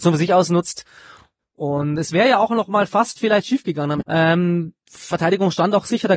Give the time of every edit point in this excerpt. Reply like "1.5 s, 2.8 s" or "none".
4.0 s